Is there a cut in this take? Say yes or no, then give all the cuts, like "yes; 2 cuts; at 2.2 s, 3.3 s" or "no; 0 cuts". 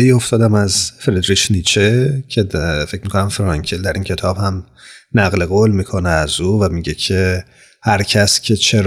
no; 0 cuts